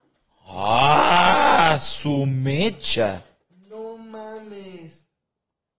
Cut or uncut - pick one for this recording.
uncut